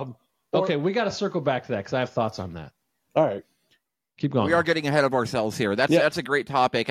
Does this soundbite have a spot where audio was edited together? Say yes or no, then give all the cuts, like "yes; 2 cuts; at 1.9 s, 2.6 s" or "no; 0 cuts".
no; 0 cuts